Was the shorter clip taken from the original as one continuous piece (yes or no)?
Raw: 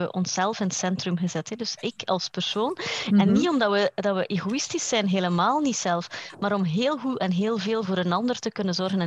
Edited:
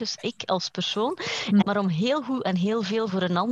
no